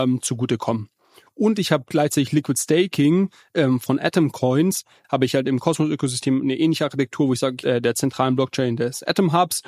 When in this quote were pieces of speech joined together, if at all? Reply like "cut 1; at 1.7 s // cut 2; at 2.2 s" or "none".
cut 1; at 1.3 s // cut 2; at 5.0 s // cut 3; at 7.6 s